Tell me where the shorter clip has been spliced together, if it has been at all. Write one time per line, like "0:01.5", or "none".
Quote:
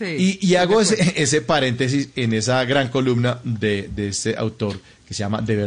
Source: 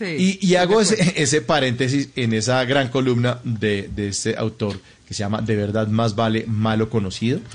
none